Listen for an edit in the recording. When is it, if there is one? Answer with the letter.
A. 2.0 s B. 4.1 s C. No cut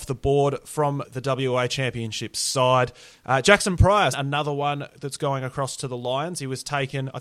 B